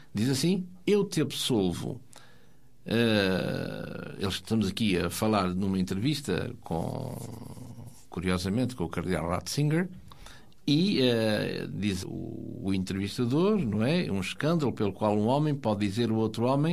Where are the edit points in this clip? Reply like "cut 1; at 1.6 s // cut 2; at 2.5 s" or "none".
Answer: cut 1; at 12.0 s